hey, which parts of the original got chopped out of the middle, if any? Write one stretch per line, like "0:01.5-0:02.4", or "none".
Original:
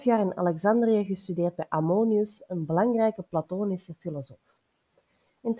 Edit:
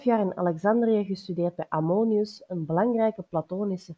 none